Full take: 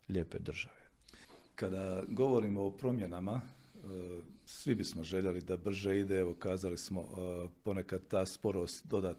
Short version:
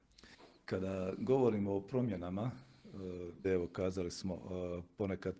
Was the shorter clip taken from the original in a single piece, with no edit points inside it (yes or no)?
no